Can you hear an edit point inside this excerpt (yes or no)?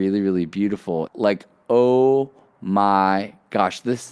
yes